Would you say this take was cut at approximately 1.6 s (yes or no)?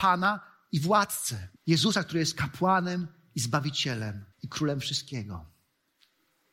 yes